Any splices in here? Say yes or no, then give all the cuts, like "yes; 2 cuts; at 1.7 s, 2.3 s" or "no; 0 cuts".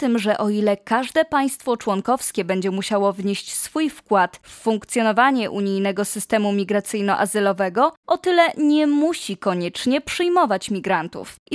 no; 0 cuts